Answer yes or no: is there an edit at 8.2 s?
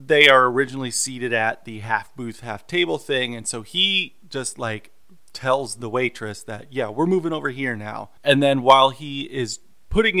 yes